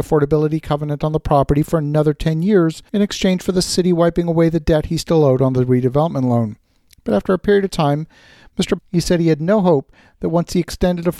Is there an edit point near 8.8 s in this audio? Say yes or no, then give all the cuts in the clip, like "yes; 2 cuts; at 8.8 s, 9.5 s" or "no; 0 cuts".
yes; 2 cuts; at 2.9 s, 8.8 s